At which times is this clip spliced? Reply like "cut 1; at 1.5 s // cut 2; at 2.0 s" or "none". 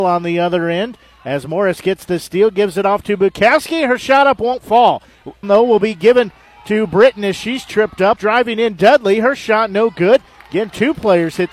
cut 1; at 5.4 s // cut 2; at 8.2 s